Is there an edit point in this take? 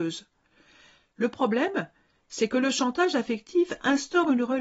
no; 0 cuts

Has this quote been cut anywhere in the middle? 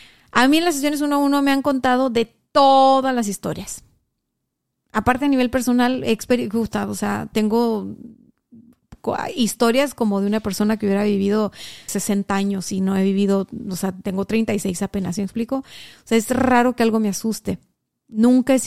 yes; 1 cut; at 11.9 s

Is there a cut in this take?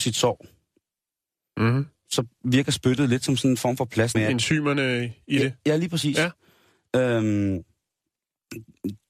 yes; 1 cut; at 4.1 s

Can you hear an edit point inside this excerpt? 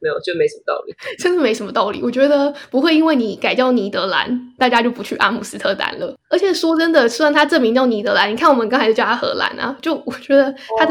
no; 0 cuts

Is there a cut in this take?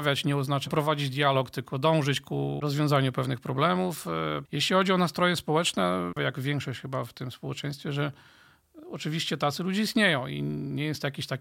yes; 2 cuts; at 4.5 s, 6.2 s

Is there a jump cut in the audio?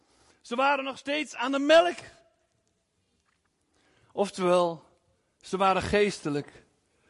no; 0 cuts

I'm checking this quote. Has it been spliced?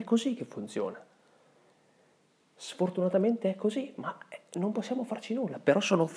no; 0 cuts

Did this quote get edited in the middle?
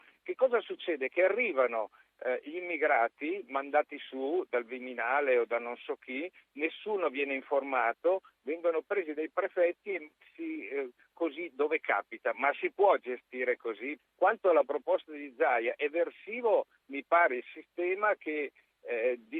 yes; 1 cut; at 14.0 s

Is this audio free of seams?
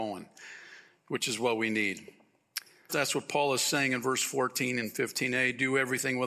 no; 1 cut; at 2.9 s

